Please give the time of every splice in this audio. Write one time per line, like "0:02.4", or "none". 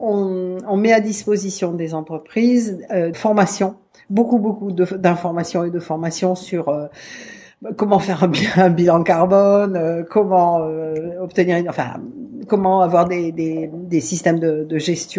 0:03.1

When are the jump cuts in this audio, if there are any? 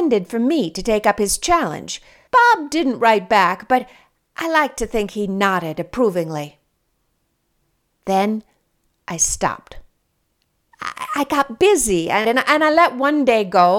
0:02.3
0:12.2

